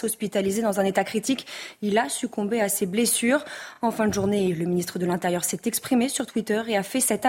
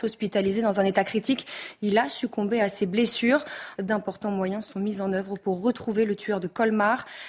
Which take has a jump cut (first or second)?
second